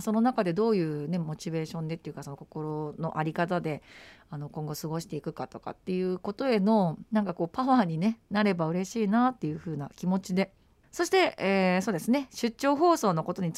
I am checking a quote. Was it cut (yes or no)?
yes